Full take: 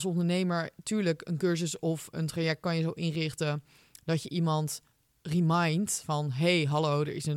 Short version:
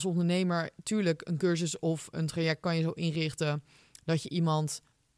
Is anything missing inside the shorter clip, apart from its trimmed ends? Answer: no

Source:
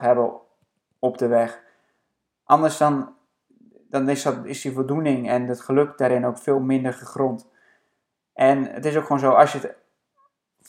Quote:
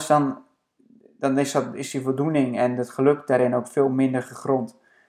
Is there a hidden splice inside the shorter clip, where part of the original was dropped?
no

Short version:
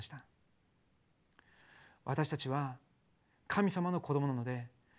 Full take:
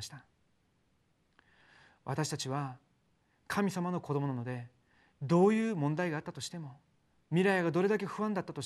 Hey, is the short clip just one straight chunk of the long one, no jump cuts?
yes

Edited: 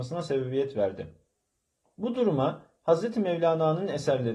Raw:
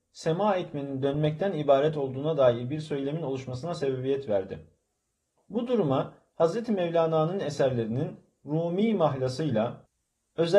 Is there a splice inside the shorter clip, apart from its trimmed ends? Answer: no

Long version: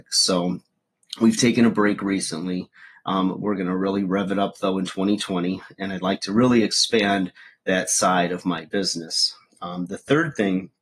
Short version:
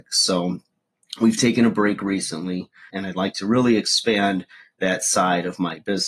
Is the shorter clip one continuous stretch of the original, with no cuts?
no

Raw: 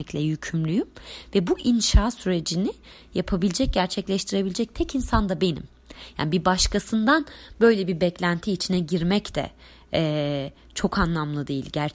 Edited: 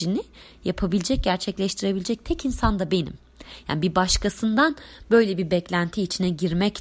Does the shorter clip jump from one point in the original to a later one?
no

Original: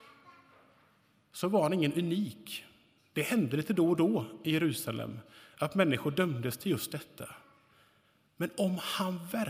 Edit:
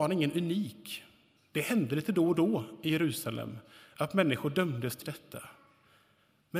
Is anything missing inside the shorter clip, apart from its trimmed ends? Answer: yes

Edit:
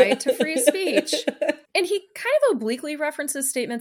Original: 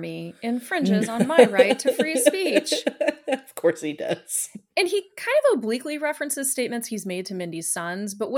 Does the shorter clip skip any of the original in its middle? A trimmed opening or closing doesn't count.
yes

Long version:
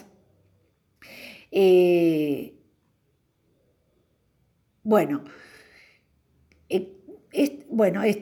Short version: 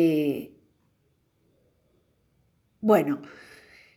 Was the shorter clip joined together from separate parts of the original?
no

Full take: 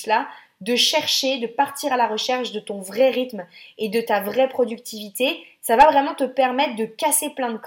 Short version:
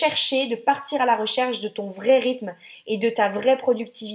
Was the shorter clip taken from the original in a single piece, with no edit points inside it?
yes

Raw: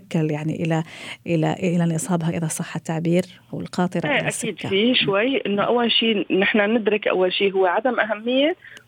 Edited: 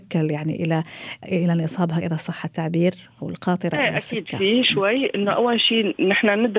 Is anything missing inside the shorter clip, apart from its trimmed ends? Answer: yes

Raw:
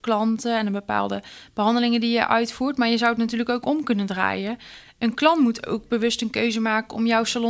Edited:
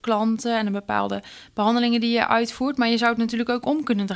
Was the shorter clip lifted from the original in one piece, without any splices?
yes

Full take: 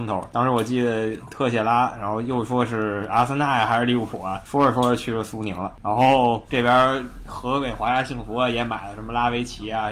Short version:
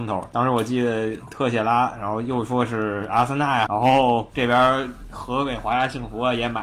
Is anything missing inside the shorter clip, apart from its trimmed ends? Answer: yes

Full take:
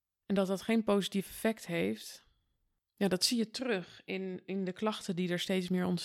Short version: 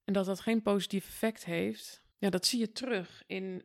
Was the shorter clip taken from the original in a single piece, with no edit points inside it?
no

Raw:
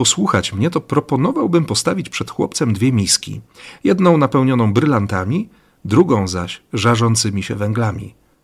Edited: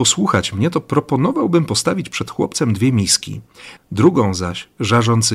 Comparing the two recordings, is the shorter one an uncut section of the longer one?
no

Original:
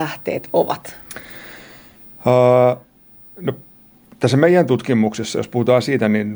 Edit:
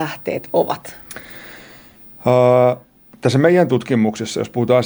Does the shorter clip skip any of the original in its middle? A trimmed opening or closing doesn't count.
yes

